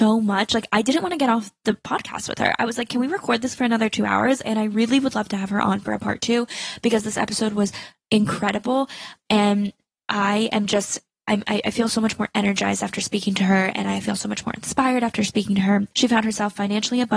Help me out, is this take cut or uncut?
cut